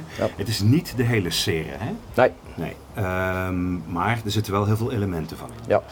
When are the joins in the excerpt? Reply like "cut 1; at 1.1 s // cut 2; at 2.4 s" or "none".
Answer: none